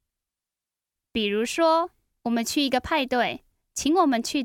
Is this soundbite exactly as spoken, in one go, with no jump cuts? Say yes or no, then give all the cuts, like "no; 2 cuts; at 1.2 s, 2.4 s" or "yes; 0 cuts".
no; 1 cut; at 1.0 s